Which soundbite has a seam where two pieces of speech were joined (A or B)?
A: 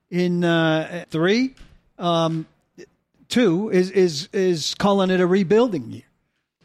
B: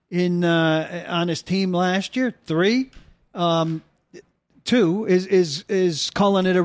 A